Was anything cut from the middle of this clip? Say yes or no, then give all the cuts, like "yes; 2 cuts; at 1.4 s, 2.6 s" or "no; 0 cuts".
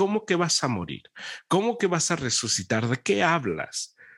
no; 0 cuts